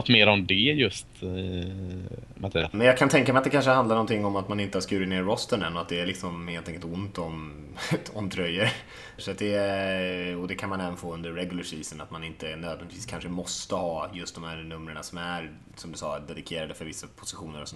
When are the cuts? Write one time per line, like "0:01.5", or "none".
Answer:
0:02.7
0:09.2